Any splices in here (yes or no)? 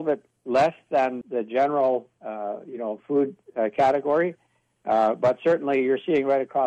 yes